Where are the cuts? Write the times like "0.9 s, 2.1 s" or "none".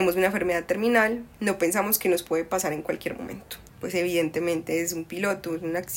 3.7 s